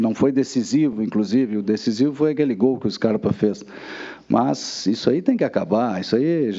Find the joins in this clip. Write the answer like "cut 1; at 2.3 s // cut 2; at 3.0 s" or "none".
none